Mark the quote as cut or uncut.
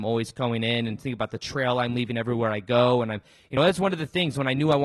uncut